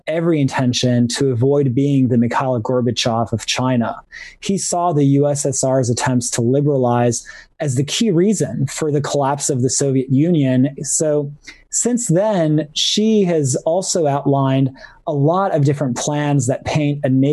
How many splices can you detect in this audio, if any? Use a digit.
1